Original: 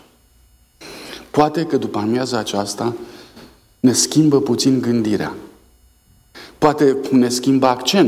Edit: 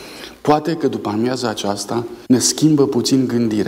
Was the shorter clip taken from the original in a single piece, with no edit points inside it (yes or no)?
no